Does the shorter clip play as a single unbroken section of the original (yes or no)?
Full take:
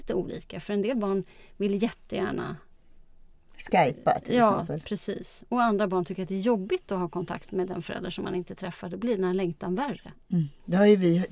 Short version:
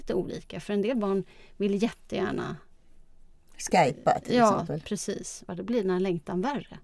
no